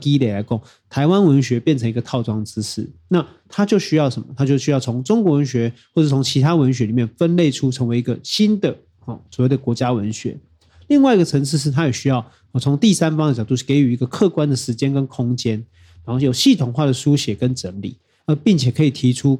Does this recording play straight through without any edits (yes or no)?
yes